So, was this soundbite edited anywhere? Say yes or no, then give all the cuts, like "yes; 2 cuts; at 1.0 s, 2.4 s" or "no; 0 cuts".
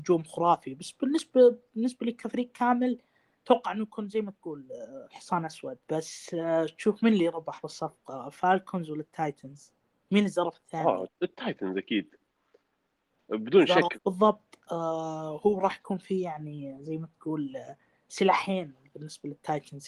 yes; 3 cuts; at 5.8 s, 11.1 s, 13.9 s